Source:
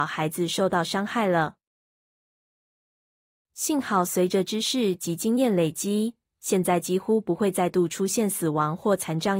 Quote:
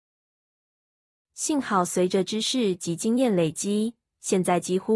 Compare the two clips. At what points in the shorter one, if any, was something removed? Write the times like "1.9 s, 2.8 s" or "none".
none